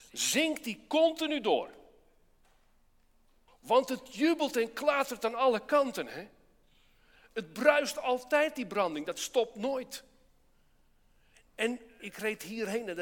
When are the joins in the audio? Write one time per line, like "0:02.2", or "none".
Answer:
0:03.5
0:12.0